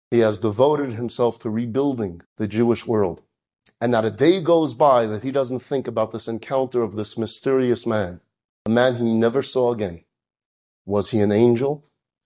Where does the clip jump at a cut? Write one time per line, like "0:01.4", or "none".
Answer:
0:02.3